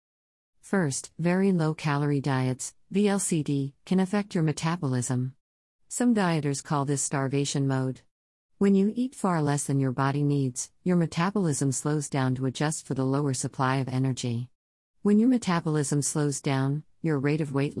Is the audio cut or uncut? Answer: uncut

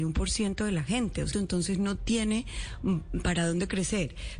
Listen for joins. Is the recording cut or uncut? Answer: cut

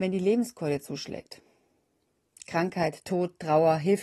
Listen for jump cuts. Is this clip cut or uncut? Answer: uncut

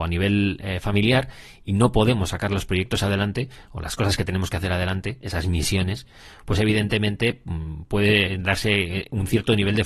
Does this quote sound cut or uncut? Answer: uncut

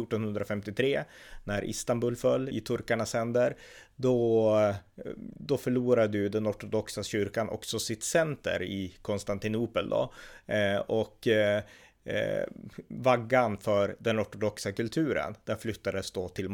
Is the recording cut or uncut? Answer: cut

